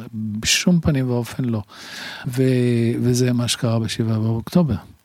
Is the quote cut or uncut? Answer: cut